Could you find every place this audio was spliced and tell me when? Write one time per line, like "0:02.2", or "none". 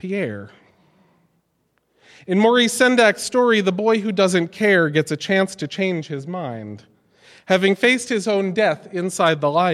none